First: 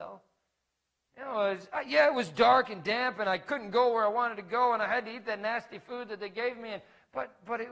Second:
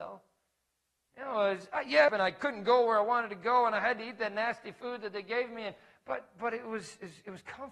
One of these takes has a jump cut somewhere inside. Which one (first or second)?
second